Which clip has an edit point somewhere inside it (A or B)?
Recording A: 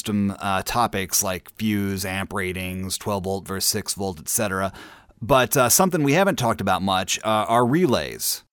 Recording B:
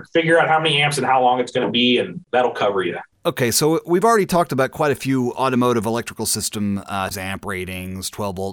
B